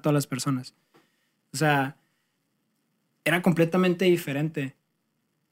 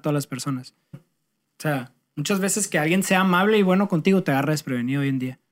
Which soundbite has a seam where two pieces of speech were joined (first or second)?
second